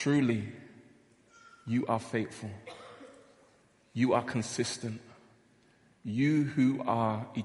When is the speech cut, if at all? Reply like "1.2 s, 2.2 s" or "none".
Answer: none